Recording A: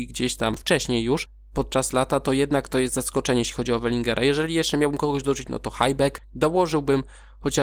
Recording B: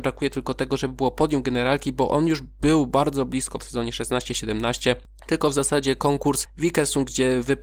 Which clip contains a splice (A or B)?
A